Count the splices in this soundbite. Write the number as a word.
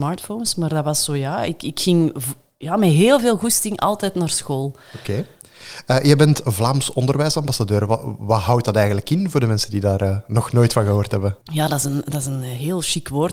one